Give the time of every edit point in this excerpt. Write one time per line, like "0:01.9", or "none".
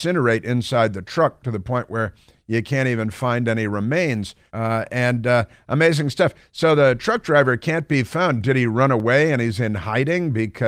0:04.5